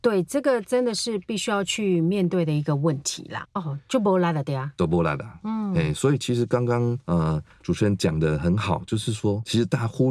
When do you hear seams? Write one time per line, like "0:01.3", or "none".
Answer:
0:03.4